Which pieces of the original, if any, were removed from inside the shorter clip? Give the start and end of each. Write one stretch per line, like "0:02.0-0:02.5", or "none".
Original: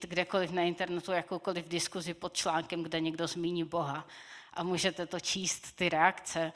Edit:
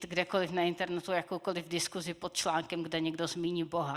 none